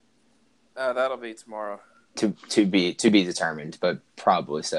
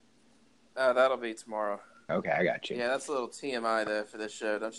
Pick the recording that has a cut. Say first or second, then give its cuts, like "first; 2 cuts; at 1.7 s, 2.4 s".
second; 1 cut; at 2.1 s